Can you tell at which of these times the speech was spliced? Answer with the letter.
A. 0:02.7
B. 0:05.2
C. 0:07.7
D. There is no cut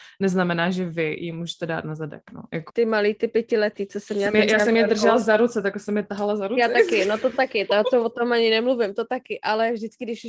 A